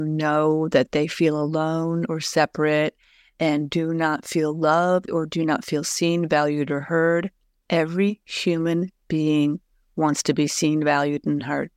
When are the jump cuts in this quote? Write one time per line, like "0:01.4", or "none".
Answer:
0:05.1